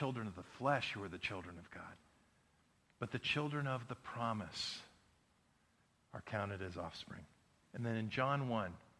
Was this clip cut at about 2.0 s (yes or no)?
no